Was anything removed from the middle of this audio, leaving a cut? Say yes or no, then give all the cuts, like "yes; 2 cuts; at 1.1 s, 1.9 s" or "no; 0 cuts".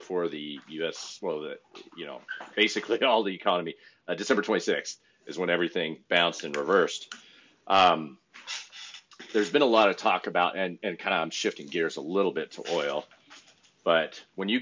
no; 0 cuts